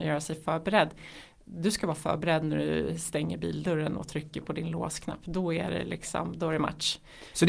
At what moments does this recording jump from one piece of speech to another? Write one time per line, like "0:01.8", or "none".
none